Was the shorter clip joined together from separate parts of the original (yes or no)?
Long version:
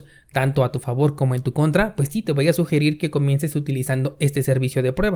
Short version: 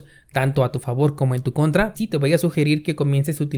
yes